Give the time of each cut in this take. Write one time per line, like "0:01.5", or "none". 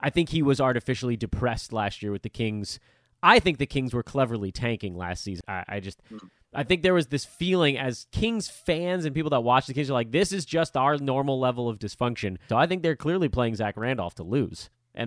0:05.4
0:12.5